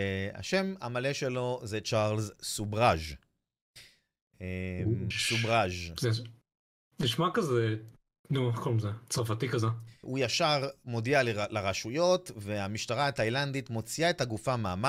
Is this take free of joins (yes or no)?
no